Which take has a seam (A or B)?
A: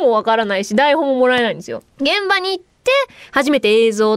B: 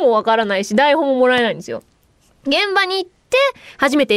A